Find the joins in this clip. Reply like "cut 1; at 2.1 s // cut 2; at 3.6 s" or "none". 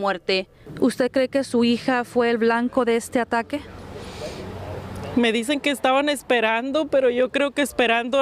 none